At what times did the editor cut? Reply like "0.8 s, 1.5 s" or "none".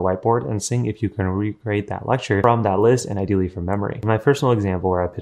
none